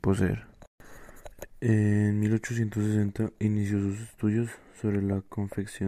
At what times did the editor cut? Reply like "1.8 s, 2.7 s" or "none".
none

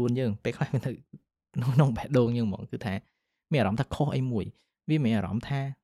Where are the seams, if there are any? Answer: none

